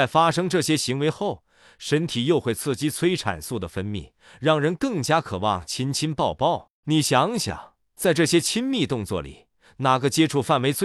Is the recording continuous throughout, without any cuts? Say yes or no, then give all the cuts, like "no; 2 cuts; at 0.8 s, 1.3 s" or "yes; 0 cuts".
no; 1 cut; at 6.8 s